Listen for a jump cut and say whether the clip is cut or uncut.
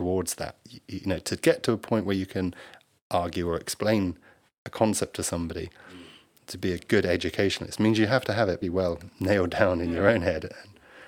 cut